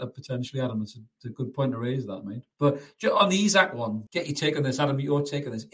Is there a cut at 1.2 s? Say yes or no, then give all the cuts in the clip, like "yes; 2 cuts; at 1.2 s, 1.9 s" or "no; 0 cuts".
no; 2 cuts; at 2.5 s, 4.1 s